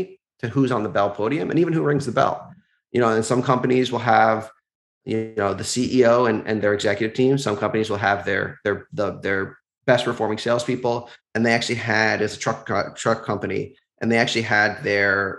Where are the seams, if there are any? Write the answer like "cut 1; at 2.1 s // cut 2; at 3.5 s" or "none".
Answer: cut 1; at 11.2 s